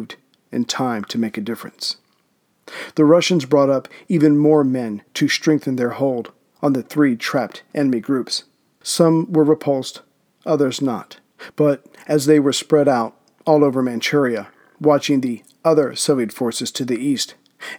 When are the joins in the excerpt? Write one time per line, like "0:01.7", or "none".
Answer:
0:08.8
0:11.5